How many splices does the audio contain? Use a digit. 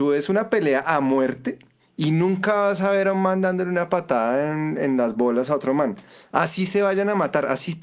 0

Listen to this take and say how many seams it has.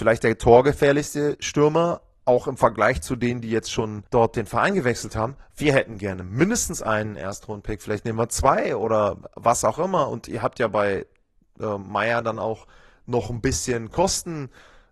1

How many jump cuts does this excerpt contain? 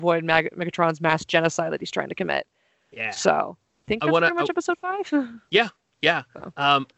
0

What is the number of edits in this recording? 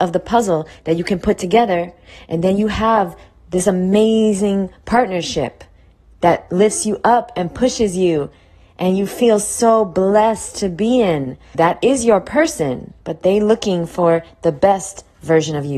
2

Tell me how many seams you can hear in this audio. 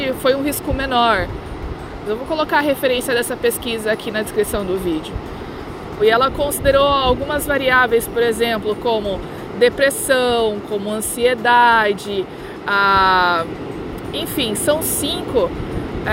2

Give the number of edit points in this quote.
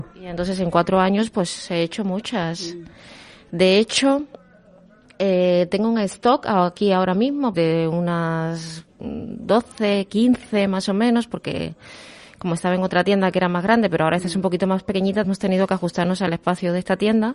2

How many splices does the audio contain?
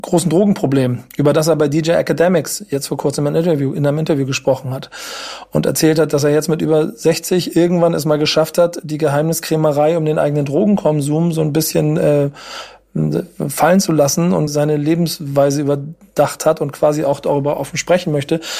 1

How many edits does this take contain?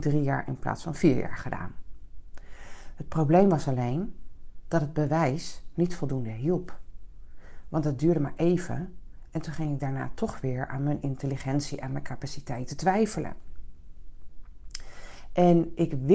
0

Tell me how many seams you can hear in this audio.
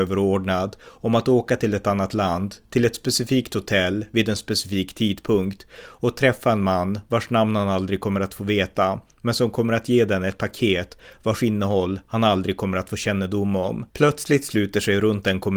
1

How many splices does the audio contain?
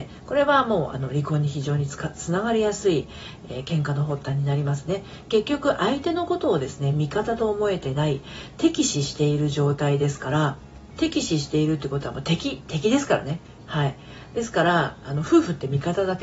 1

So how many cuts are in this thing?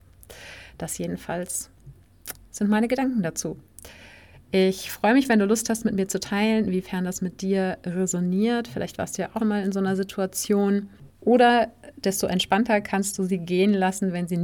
2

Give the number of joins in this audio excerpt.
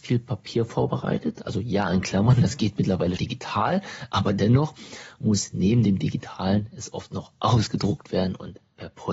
1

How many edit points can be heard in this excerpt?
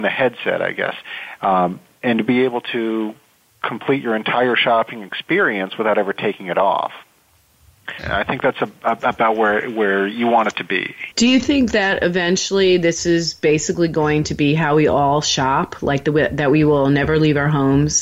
2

